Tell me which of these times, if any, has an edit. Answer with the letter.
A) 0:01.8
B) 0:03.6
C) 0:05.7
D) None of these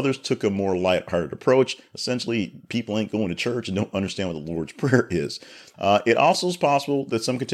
C